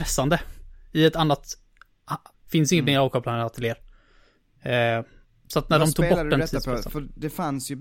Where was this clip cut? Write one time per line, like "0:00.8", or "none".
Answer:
0:02.3